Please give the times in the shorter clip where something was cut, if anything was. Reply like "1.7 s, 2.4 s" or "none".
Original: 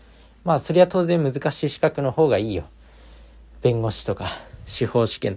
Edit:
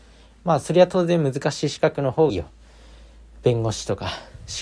2.3 s

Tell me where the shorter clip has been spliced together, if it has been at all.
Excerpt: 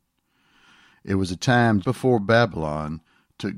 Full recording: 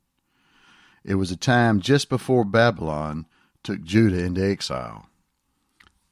1.8 s

